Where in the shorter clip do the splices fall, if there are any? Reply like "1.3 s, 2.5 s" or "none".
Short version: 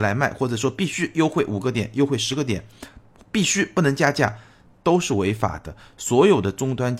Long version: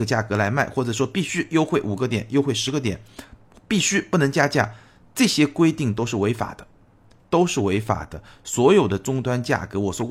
4.7 s